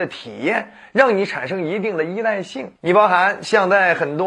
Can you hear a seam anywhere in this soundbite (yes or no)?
yes